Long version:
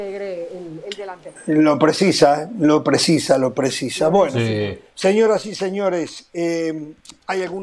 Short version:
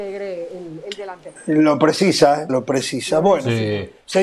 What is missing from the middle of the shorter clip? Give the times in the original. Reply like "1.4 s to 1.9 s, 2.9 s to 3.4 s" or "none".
2.5 s to 3.4 s